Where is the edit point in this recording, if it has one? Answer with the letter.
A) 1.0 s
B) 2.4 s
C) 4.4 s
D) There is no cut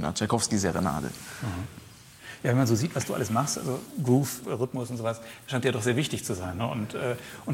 C